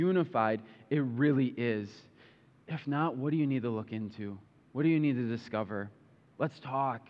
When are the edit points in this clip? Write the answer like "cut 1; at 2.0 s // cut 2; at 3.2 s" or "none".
none